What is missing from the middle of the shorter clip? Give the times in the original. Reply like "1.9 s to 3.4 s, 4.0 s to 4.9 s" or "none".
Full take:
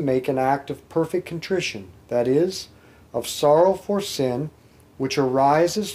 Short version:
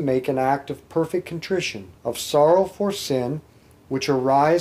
1.9 s to 3.0 s